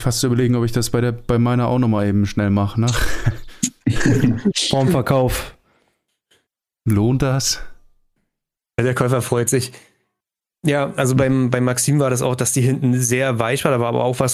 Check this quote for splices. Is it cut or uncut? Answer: uncut